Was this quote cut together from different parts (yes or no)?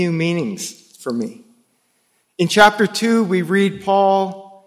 no